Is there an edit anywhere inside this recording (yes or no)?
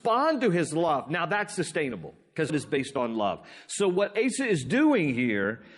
yes